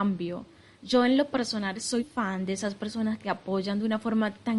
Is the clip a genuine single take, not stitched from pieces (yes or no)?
no